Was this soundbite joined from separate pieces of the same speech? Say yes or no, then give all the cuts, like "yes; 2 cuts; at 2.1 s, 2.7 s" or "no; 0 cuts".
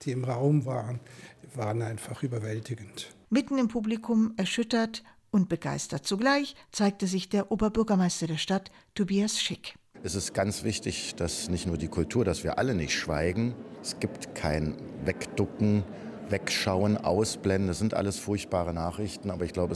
no; 0 cuts